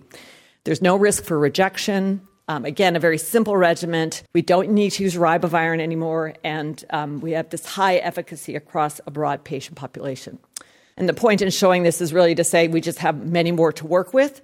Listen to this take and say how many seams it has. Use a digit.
2